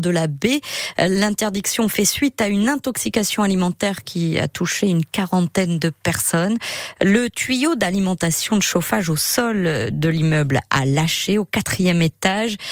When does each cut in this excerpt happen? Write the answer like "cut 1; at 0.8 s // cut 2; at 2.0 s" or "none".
cut 1; at 0.9 s // cut 2; at 7.0 s